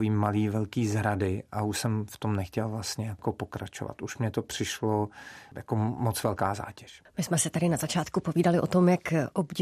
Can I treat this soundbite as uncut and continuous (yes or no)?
yes